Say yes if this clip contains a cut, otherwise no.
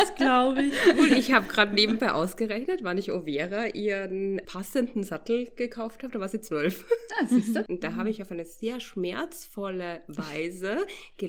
yes